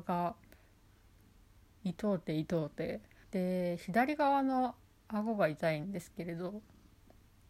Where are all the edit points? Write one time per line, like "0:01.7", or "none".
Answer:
0:03.2